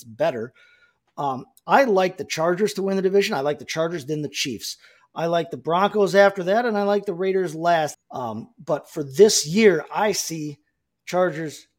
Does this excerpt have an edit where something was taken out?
yes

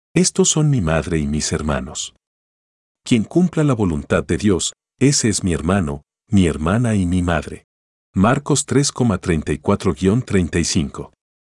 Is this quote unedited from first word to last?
yes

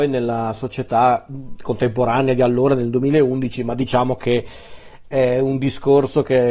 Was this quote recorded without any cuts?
yes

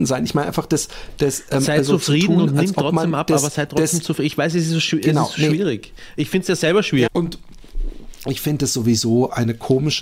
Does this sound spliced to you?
yes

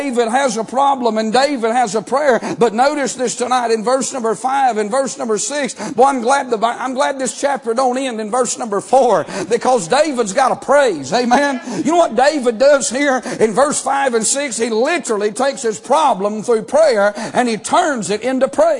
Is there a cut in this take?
no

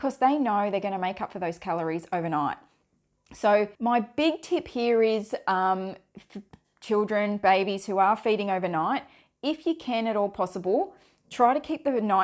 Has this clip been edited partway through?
yes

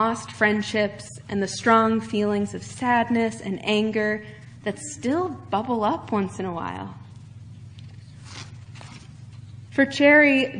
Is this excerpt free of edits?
no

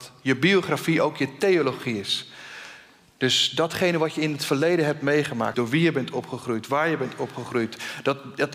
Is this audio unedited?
no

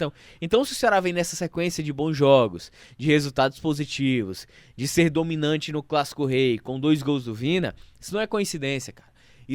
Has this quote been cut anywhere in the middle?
no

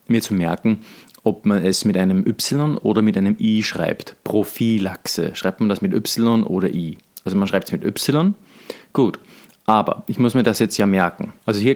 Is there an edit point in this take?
no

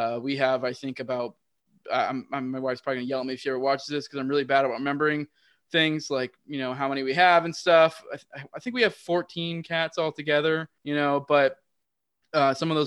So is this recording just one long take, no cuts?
no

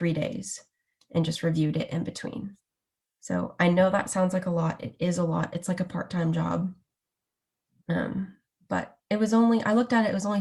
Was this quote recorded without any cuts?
yes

